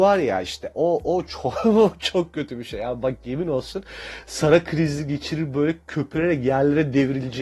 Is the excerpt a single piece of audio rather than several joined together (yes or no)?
yes